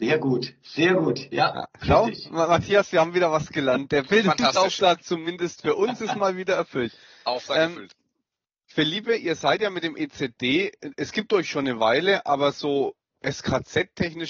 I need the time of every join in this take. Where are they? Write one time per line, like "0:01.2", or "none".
none